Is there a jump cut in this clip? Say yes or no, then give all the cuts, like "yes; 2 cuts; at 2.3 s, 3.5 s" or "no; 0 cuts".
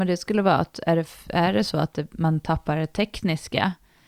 no; 0 cuts